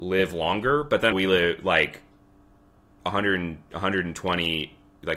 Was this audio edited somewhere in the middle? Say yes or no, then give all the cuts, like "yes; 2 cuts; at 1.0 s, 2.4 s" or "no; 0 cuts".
yes; 1 cut; at 1.1 s